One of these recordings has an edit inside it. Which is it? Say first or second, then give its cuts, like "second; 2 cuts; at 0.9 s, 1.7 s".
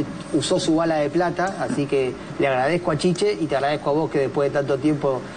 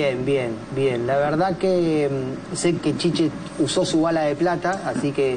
second; 1 cut; at 2.8 s